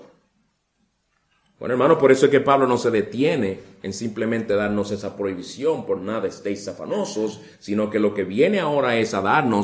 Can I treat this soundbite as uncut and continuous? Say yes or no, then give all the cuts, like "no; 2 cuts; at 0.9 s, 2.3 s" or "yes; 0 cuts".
yes; 0 cuts